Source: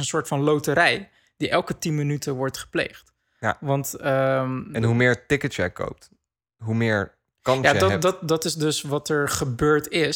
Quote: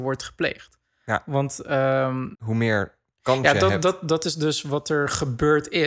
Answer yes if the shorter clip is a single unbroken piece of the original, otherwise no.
no